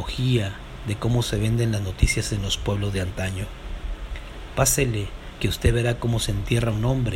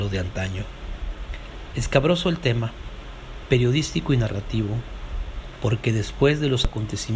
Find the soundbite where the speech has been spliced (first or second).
second